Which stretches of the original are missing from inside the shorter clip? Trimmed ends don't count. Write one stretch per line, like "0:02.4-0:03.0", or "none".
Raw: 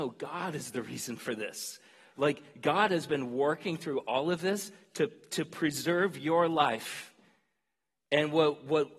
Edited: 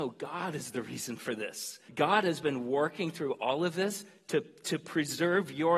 0:01.9-0:02.5